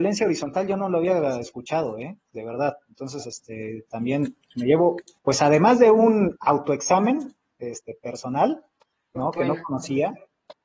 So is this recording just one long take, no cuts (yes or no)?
no